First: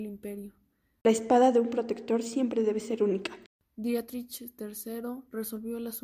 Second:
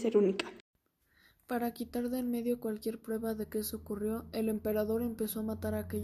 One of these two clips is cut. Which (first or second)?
first